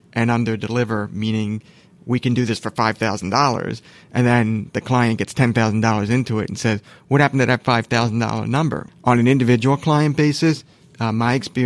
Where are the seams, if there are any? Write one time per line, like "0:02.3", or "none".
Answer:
0:08.9